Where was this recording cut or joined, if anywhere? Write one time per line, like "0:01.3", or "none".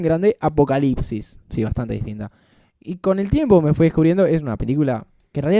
0:01.4